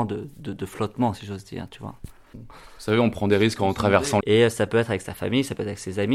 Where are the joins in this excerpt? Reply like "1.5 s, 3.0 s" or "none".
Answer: 4.2 s